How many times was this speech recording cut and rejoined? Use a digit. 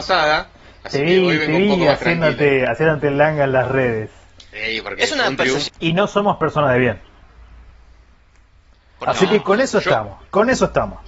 1